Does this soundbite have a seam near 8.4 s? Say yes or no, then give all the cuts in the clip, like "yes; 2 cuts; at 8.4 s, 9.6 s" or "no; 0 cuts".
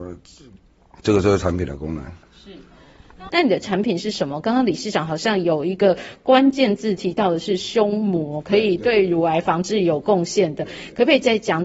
no; 1 cut; at 3.3 s